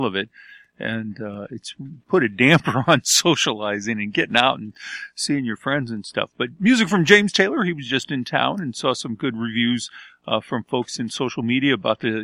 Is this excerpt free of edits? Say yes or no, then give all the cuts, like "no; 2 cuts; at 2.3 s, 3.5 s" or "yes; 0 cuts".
no; 1 cut; at 2.0 s